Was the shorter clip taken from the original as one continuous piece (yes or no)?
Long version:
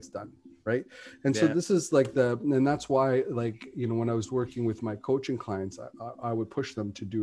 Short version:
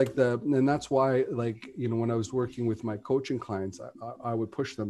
yes